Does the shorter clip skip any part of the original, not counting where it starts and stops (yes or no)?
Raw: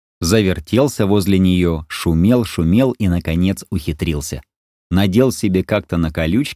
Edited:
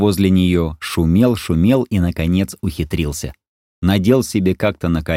no